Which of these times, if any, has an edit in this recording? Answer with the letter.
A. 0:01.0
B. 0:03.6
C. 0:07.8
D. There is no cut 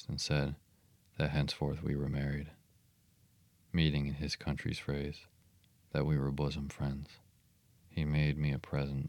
C